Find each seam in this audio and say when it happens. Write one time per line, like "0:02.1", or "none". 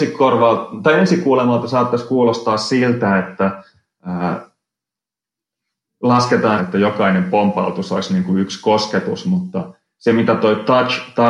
0:06.6